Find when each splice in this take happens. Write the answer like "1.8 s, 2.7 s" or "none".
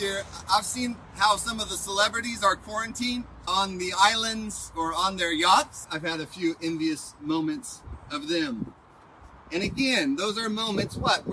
3.5 s, 5.8 s

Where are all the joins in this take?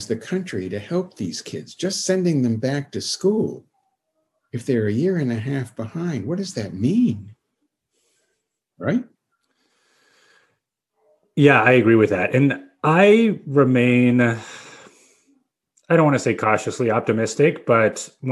none

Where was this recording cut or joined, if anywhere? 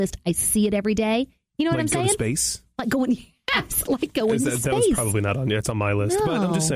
none

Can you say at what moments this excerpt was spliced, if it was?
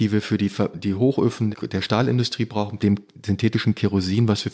1.5 s, 2.8 s

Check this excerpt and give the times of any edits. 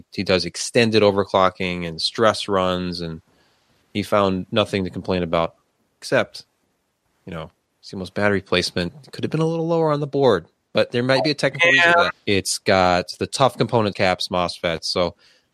12.1 s, 13.9 s

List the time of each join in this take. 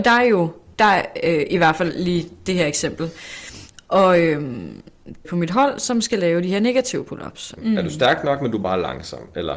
5.2 s, 7.6 s

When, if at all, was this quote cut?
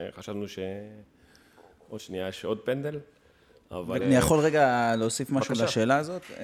4.0 s

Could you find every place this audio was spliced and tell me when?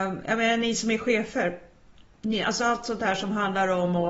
none

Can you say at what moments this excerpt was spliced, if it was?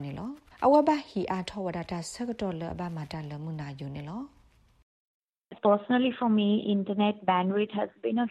5.6 s

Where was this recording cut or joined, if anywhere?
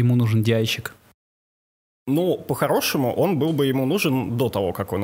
none

